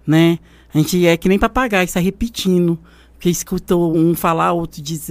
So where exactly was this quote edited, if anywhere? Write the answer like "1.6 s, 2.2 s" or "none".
none